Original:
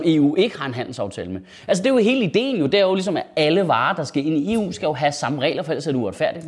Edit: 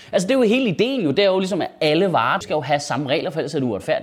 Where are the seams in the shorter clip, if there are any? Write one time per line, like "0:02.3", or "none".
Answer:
0:02.4